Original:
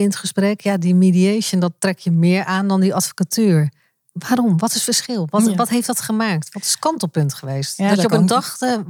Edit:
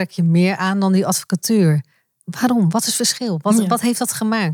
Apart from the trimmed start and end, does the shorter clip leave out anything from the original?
no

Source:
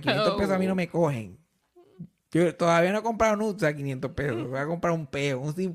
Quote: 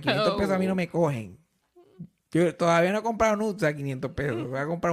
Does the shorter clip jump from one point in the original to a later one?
no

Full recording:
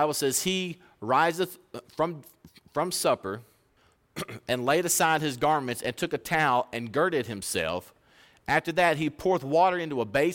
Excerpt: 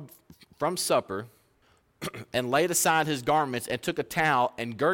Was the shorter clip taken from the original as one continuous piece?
yes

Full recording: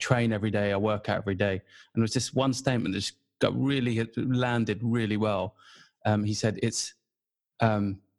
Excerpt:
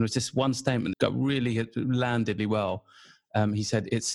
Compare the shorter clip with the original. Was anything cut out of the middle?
yes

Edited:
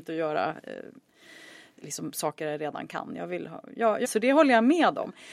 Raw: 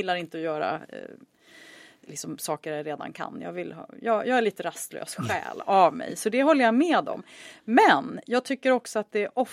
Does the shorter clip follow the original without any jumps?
no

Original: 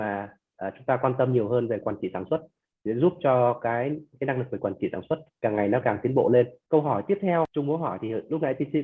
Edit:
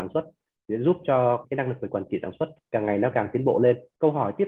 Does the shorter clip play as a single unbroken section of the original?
no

